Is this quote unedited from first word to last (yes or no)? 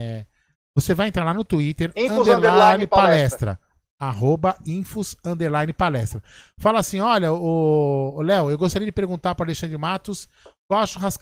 no